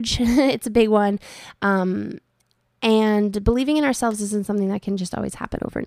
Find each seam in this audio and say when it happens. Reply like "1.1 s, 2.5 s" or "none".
none